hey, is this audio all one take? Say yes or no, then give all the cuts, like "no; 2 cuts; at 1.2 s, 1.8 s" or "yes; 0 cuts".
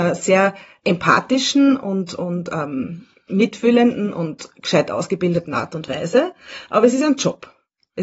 yes; 0 cuts